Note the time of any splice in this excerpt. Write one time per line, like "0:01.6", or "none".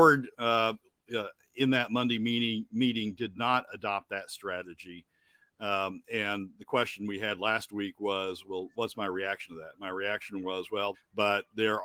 0:10.9